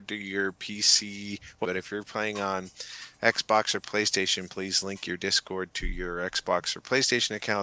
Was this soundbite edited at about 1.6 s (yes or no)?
yes